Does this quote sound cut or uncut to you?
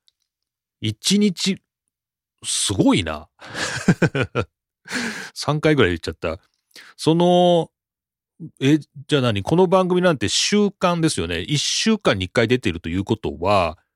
uncut